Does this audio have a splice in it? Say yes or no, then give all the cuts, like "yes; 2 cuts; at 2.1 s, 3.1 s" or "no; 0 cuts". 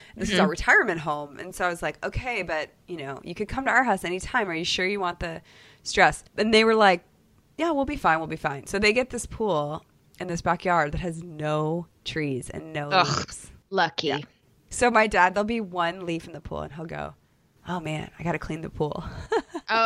no; 0 cuts